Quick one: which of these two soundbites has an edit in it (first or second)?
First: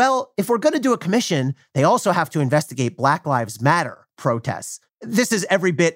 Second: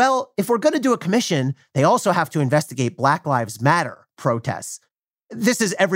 first